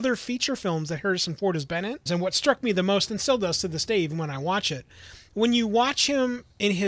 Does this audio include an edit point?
yes; 1 cut; at 2.1 s

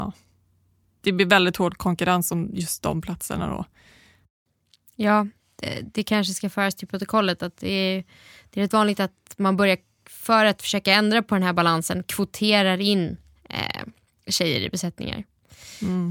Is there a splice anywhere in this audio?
no; 0 cuts

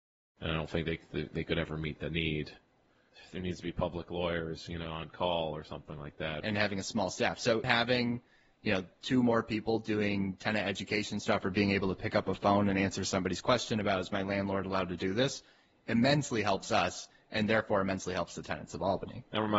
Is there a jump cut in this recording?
yes; 2 cuts; at 6.4 s, 7.6 s

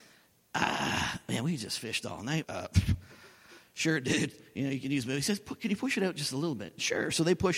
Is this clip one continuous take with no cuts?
no; 1 cut; at 2.4 s

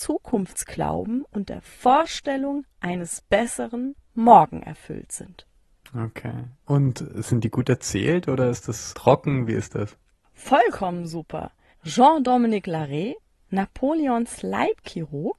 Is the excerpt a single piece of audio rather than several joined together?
no; 2 cuts; at 8.9 s, 11.7 s

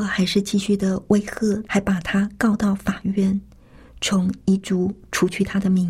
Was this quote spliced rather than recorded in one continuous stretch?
yes; 1 cut; at 1.7 s

